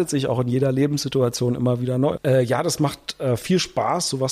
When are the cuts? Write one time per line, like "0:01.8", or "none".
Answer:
0:02.2